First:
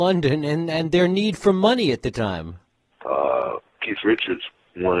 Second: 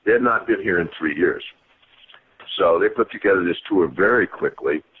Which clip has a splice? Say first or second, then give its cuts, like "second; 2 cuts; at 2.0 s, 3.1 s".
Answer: first; 1 cut; at 2.9 s